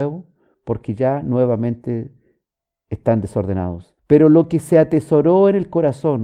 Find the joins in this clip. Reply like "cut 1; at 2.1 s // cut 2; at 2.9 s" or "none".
cut 1; at 4.0 s